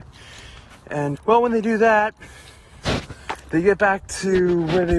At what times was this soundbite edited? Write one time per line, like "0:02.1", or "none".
0:01.1

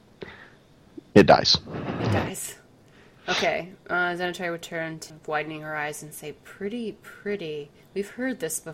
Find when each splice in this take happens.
0:05.1

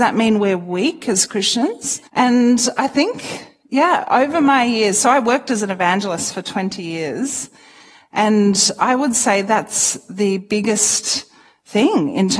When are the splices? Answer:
0:02.1

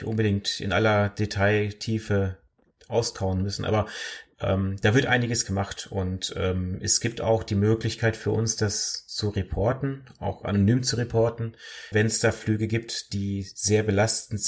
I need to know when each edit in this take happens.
0:11.9

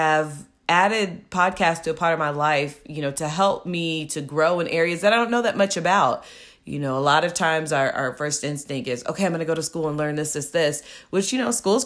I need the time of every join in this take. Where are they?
none

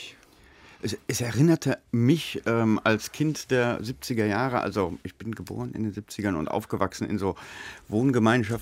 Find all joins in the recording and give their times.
0:01.9

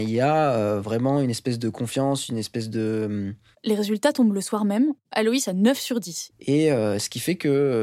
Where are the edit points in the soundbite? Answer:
0:03.5
0:05.0
0:06.3

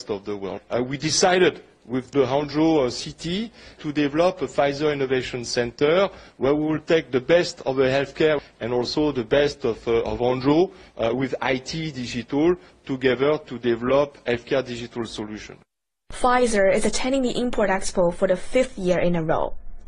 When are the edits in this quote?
0:03.8

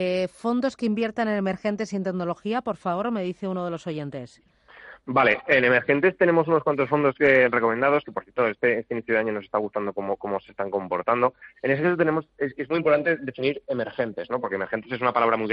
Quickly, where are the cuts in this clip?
none

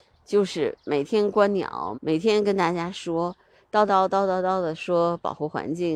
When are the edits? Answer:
0:01.9
0:03.9

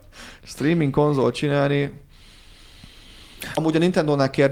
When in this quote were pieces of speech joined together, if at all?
0:03.6

